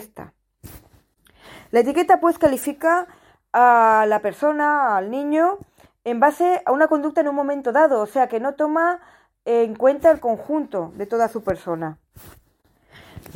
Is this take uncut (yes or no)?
yes